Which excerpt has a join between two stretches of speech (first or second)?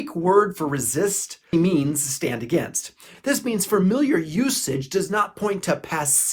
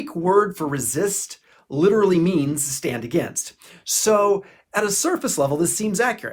first